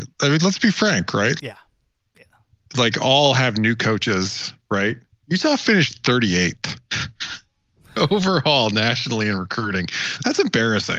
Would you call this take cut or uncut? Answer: cut